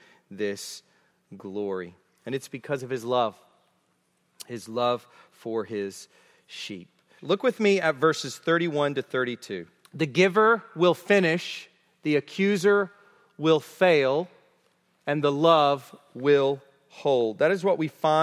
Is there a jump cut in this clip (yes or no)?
yes